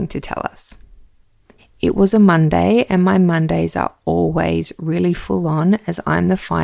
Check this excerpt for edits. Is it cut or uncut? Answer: cut